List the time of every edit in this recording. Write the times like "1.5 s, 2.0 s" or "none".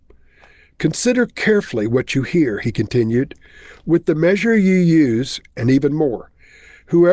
5.5 s